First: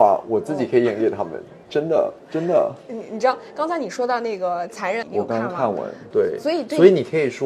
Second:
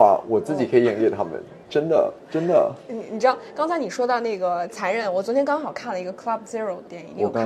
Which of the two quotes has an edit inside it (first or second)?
first